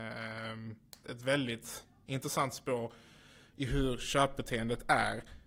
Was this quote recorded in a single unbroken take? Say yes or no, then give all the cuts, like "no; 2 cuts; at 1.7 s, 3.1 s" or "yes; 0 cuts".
no; 1 cut; at 1.0 s